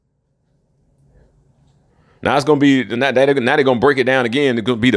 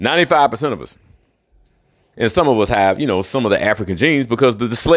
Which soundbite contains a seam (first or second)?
second